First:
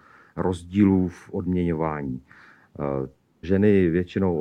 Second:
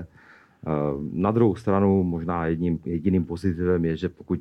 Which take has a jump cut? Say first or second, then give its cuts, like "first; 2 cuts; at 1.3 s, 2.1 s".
first; 1 cut; at 3.4 s